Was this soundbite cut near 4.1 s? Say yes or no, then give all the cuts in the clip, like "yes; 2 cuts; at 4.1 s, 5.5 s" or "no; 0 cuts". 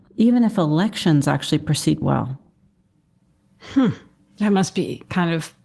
no; 1 cut; at 2.0 s